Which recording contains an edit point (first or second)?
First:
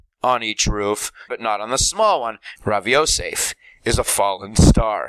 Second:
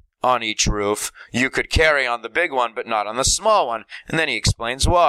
first